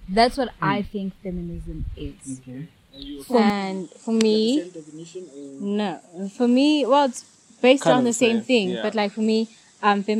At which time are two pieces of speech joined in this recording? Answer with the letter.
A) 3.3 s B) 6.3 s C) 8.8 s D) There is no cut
D